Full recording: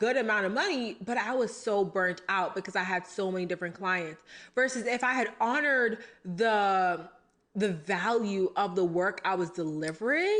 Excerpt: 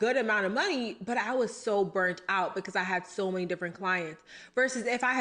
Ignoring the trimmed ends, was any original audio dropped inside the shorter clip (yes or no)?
no